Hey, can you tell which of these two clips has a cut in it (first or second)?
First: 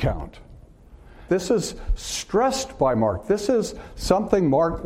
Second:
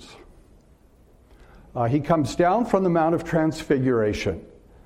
first